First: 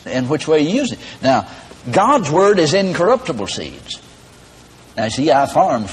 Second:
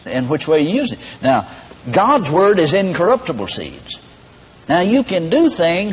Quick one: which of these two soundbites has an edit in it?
second; 1 cut; at 4.5 s

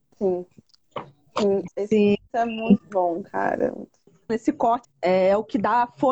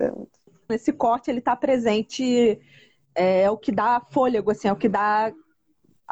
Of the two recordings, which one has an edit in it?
first; 2 cuts; at 1.7 s, 4.8 s

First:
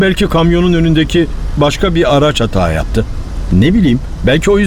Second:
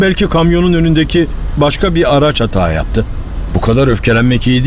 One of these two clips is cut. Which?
second; 1 cut; at 3.5 s

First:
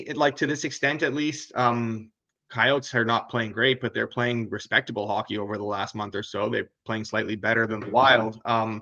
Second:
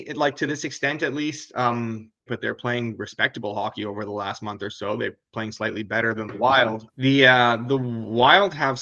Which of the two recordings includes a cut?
second; 2 cuts; at 2.3 s, 6.9 s

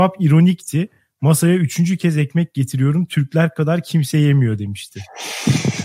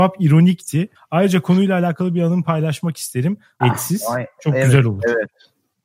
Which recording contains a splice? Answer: second; 2 cuts; at 0.9 s, 3.6 s

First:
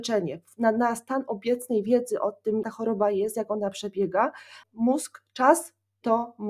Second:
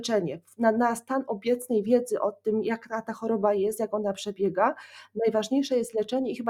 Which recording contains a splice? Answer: first; 2 cuts; at 2.6 s, 4.6 s

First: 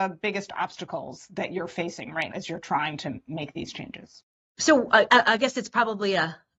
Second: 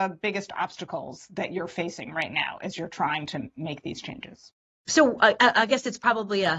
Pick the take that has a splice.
first; 1 cut; at 2.3 s

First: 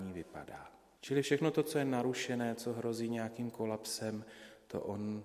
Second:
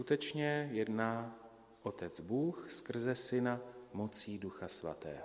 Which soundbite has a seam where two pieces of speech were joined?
first; 1 cut; at 1.0 s

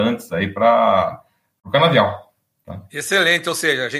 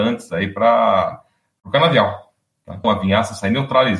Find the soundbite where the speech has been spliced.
second; 1 cut; at 2.8 s

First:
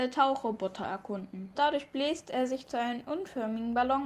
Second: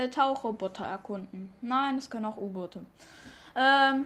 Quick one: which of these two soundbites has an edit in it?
first; 1 cut; at 1.6 s

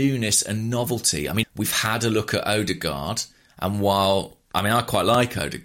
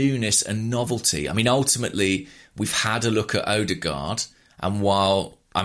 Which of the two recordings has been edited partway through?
first; 1 cut; at 1.4 s

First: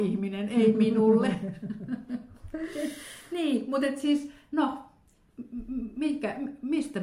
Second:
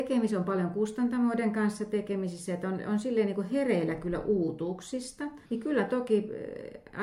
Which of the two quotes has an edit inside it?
second; 1 cut; at 5.5 s

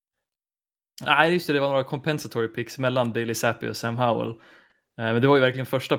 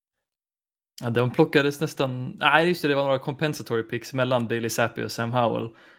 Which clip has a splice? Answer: first; 1 cut; at 1.0 s

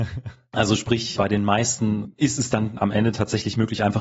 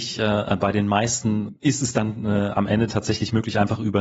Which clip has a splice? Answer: first; 2 cuts; at 1.2 s, 2.8 s

